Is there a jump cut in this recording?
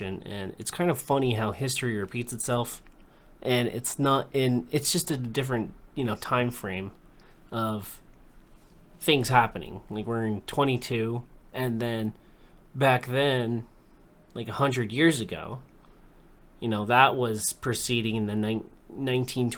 no; 0 cuts

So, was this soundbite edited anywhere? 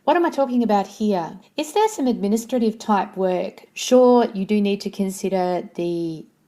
yes; 2 cuts; at 1.4 s, 3.7 s

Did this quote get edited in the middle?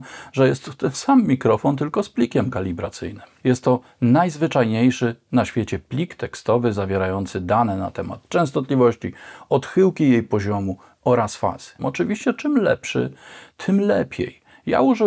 yes; 2 cuts; at 3.4 s, 11.8 s

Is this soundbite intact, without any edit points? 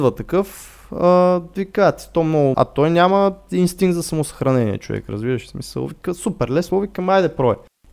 no; 2 cuts; at 2.5 s, 6.7 s

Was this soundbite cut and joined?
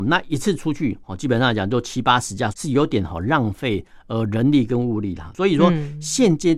yes; 1 cut; at 2.5 s

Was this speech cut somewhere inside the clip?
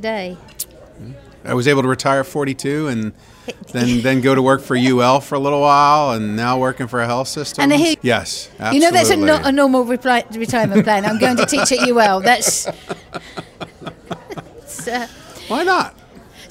yes; 1 cut; at 7.9 s

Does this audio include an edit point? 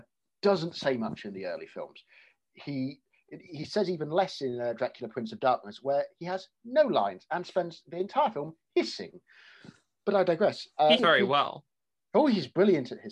yes; 1 cut; at 11.0 s

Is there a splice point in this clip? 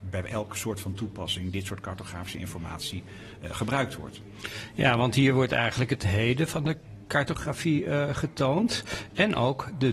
no; 0 cuts

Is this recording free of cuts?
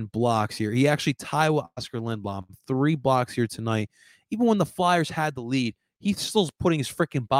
yes; 0 cuts

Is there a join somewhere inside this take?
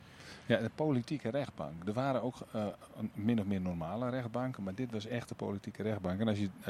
no; 0 cuts

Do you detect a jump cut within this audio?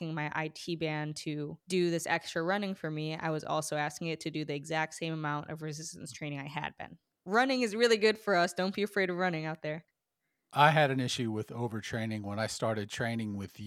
no; 0 cuts

